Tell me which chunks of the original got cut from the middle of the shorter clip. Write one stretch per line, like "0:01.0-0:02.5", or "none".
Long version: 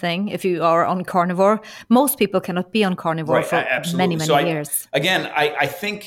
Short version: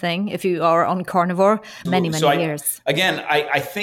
0:01.9-0:03.9